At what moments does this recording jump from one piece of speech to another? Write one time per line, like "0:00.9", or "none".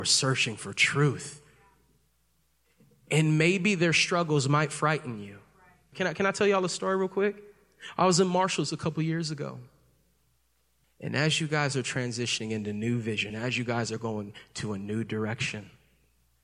0:05.9
0:10.8
0:13.3